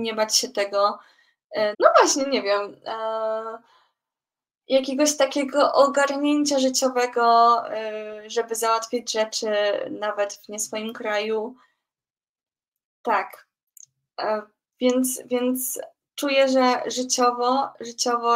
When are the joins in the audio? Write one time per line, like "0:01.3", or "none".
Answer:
0:01.7